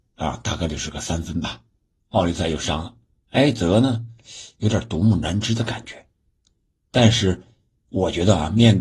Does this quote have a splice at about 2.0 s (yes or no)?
yes